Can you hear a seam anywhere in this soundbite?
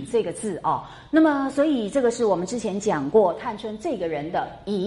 no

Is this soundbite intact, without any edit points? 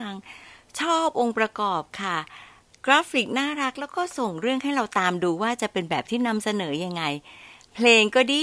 yes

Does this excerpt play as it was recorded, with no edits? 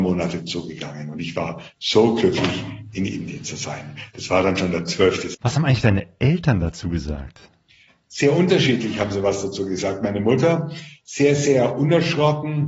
no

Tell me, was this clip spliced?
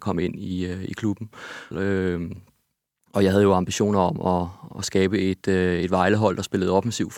yes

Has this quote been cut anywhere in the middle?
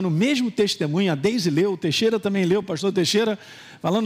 no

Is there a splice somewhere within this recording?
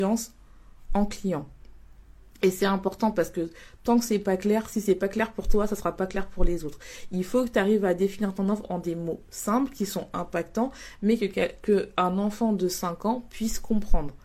no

